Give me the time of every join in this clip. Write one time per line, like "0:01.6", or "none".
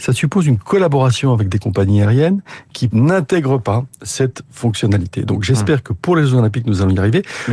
0:02.9